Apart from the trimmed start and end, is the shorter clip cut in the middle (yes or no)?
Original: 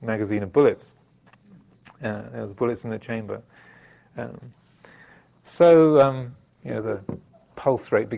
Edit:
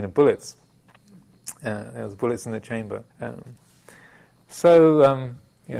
yes